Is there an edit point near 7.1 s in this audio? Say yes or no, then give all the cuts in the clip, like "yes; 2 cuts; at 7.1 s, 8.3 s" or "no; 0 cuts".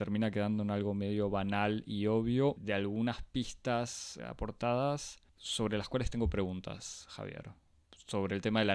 no; 3 cuts; at 2.6 s, 4.2 s, 5.3 s